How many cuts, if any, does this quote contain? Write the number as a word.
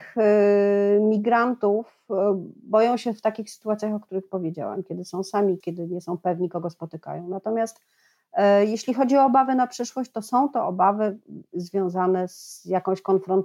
one